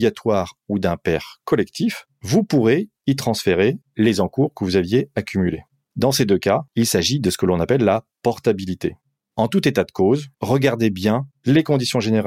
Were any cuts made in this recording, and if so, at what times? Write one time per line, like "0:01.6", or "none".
0:05.9
0:10.4